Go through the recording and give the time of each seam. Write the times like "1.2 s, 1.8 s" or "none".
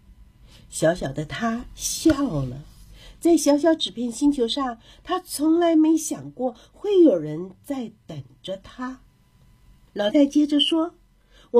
10.1 s